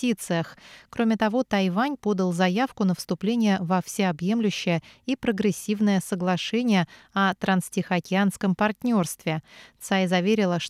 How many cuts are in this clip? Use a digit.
0